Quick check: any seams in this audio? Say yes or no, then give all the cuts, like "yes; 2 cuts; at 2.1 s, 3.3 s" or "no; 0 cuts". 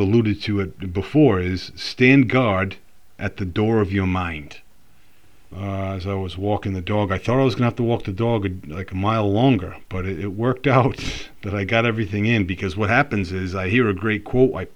yes; 1 cut; at 5.5 s